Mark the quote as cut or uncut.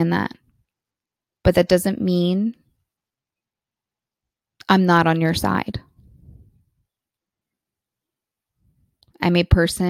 uncut